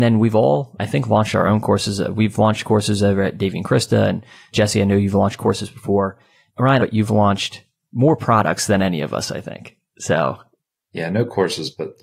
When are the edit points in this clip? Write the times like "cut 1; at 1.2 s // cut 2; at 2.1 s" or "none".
cut 1; at 6.8 s